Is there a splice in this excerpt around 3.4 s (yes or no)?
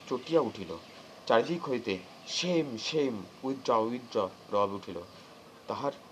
no